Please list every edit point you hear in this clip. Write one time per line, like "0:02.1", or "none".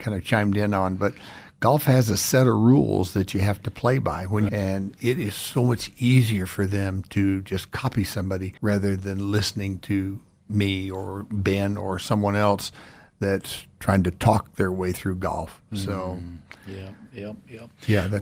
0:04.5
0:08.6